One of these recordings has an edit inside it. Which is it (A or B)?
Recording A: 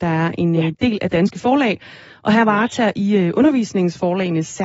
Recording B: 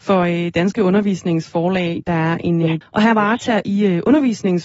B